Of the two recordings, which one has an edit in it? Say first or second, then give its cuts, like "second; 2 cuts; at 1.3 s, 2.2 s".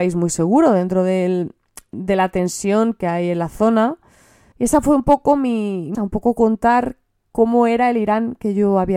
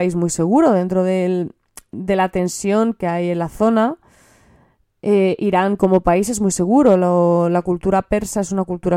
first; 2 cuts; at 4.5 s, 5.9 s